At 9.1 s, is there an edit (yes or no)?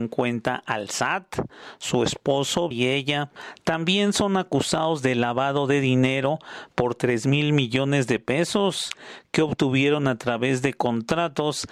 no